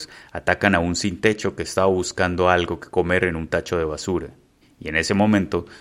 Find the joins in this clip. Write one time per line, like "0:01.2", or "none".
0:04.6